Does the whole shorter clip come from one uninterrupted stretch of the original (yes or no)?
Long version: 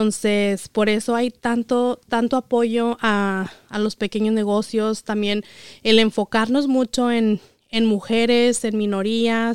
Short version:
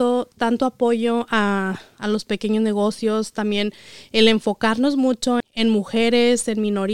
no